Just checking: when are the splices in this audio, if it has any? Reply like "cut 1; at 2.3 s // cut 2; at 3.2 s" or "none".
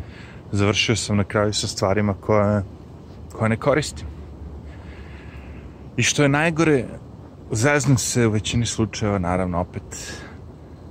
none